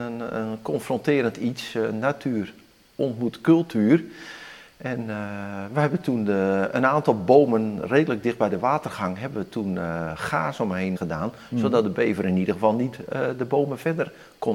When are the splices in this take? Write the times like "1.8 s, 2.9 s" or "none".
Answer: 11.0 s